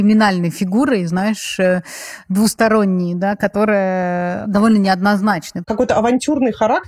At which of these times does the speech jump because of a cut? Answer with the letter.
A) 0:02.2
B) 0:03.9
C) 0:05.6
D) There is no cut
C